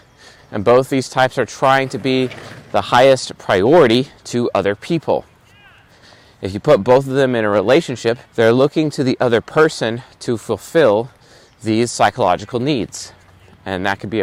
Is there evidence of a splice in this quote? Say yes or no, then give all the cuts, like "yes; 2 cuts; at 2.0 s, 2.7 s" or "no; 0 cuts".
yes; 1 cut; at 8.3 s